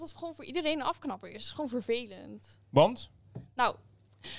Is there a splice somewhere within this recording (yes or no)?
no